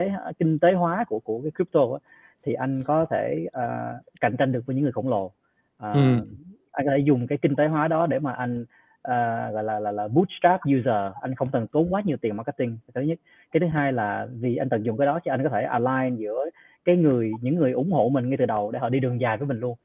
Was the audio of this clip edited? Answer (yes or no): no